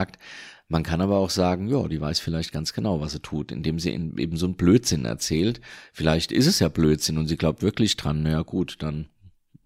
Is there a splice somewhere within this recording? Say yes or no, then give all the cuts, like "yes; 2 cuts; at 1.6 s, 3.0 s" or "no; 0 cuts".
no; 0 cuts